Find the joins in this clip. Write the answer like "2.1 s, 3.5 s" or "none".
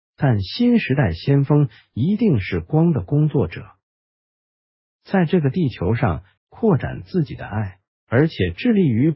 4.9 s, 6.4 s

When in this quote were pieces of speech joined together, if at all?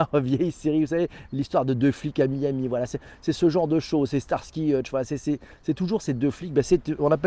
none

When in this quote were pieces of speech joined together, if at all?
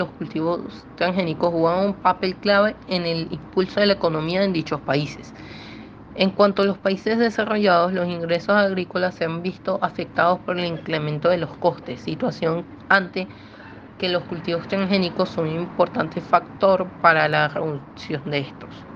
none

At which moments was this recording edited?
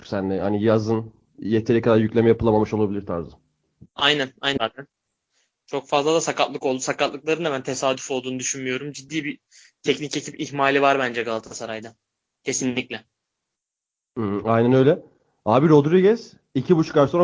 4.6 s

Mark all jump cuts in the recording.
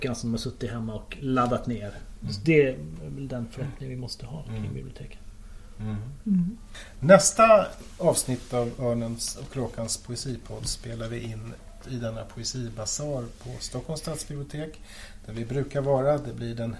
7.0 s, 11.8 s

